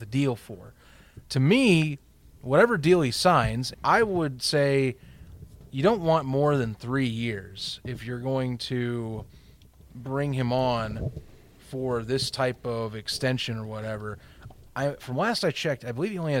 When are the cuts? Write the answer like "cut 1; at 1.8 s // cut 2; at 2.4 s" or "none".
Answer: cut 1; at 3.7 s